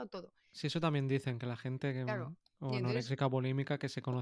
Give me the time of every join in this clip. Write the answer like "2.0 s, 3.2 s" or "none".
none